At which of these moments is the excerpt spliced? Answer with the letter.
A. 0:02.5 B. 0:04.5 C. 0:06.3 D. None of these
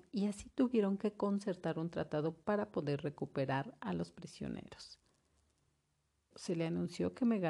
C